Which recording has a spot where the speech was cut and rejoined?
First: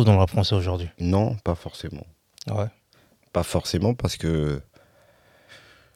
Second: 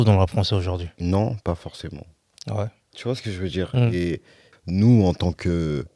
second; 2 cuts; at 2.9 s, 4.5 s

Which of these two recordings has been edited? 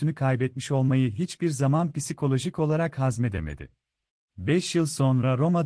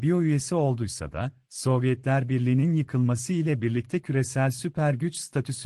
first; 1 cut; at 4.3 s

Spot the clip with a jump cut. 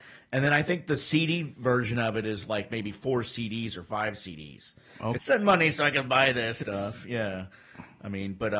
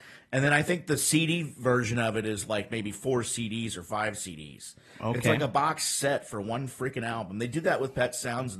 first; 2 cuts; at 5.2 s, 6.6 s

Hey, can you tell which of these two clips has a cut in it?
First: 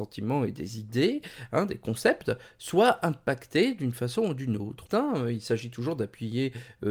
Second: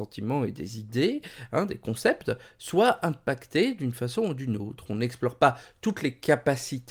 first; 1 cut; at 4.9 s

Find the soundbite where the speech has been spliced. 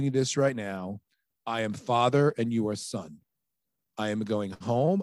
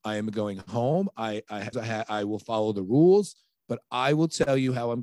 second; 1 cut; at 1.7 s

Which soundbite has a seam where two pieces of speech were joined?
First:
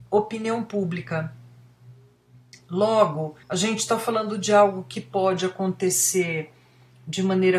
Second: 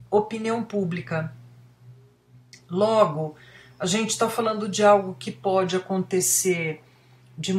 first; 1 cut; at 3.4 s

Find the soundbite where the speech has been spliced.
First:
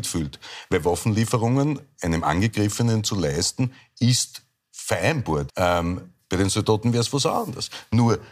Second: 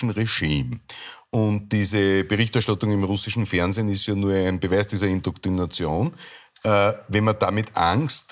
first; 1 cut; at 5.5 s

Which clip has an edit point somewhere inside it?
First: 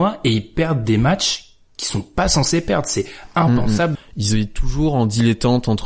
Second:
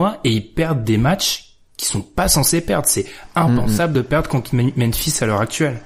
first; 1 cut; at 4.0 s

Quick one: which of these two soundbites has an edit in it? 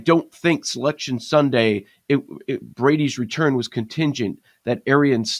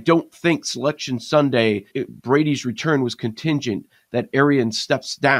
second; 1 cut; at 1.9 s

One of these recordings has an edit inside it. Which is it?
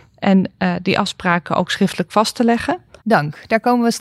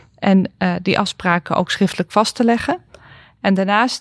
first; 1 cut; at 3.0 s

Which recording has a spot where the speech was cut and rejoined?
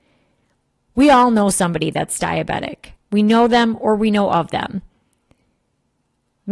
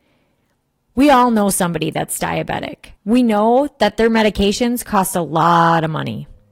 second; 1 cut; at 3.0 s

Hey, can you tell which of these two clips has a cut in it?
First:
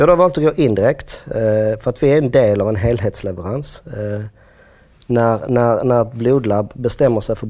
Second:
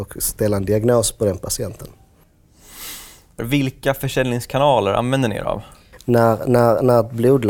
second; 2 cuts; at 3.4 s, 6.0 s

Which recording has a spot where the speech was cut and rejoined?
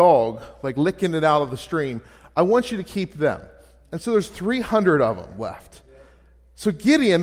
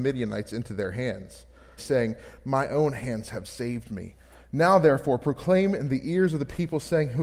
second; 1 cut; at 1.8 s

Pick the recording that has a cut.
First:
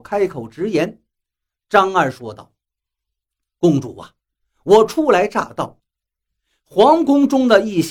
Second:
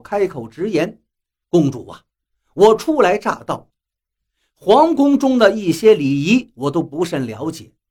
second; 1 cut; at 1.4 s

